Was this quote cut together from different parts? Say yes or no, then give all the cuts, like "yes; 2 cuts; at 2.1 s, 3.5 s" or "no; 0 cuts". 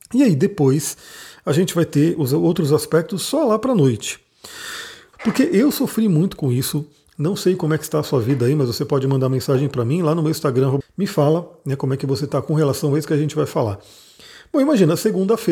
yes; 2 cuts; at 5.1 s, 10.8 s